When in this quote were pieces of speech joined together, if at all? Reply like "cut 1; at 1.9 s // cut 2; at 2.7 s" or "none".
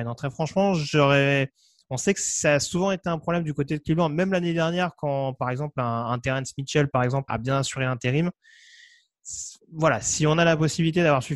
cut 1; at 7.3 s

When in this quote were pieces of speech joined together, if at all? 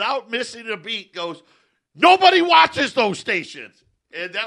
none

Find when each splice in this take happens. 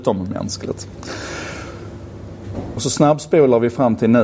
cut 1; at 2.8 s

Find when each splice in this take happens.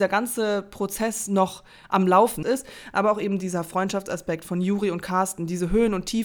cut 1; at 2.4 s

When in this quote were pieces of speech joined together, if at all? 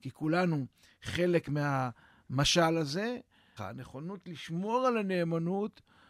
cut 1; at 3.6 s

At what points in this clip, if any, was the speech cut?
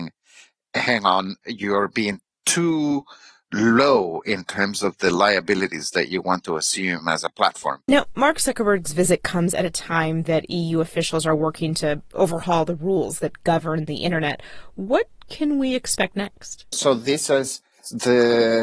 cut 1; at 7.9 s // cut 2; at 16.7 s

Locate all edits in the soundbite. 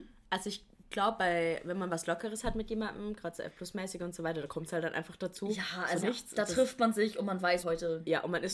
cut 1; at 6.0 s // cut 2; at 7.6 s

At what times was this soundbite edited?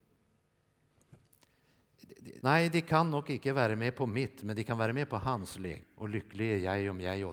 cut 1; at 2.4 s // cut 2; at 5.8 s

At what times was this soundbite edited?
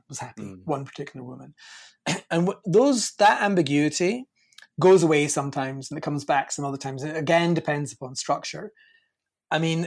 none

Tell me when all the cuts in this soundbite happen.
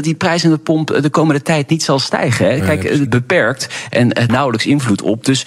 cut 1; at 3.1 s // cut 2; at 4.3 s

